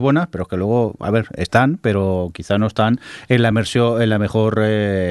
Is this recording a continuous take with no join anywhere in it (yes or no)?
yes